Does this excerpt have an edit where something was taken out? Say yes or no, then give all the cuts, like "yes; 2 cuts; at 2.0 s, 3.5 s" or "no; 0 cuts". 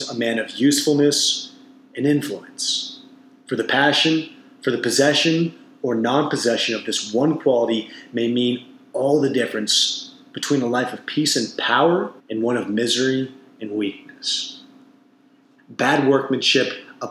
yes; 2 cuts; at 12.2 s, 15.6 s